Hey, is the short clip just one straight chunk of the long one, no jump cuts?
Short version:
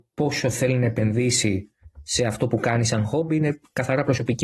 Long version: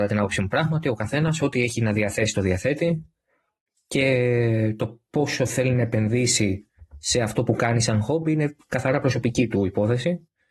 yes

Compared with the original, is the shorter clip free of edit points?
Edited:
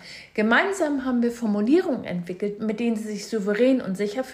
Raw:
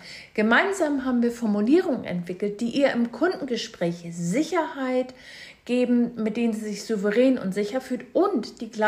no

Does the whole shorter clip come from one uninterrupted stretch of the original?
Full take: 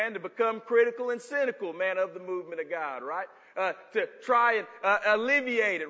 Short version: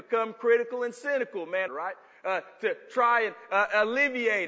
no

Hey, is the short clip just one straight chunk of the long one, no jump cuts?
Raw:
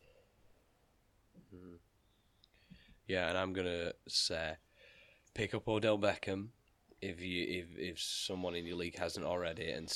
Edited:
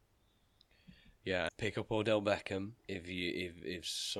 no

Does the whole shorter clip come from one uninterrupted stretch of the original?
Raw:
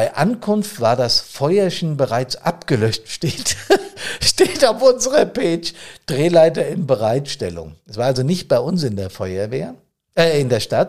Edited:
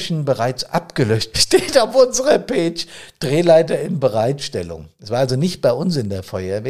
no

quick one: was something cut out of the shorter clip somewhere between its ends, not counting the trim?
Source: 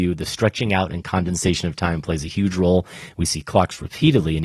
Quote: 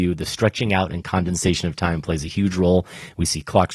no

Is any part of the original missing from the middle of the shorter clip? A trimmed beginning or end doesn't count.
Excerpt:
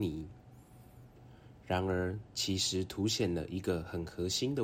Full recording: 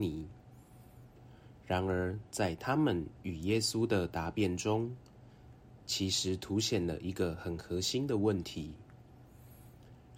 yes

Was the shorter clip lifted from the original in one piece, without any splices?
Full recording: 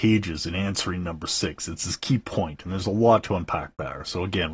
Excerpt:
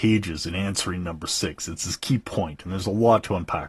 yes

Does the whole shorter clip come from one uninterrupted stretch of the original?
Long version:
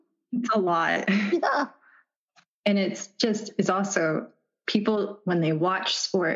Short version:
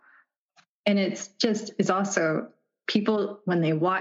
yes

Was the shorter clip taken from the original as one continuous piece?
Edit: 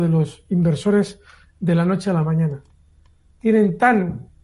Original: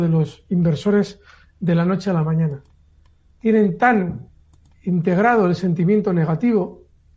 yes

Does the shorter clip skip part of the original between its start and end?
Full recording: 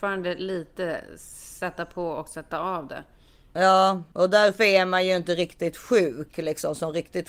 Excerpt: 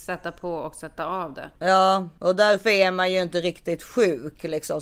yes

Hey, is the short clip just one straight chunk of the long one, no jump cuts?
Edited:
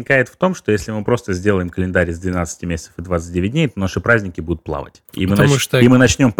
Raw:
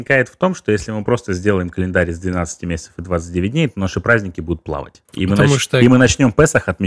yes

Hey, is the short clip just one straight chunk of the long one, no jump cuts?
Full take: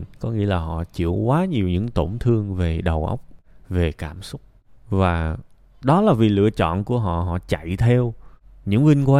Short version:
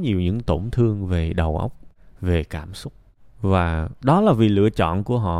no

